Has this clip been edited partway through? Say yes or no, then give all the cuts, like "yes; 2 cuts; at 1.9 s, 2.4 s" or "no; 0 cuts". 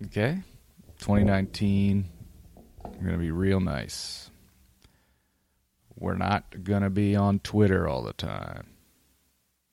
no; 0 cuts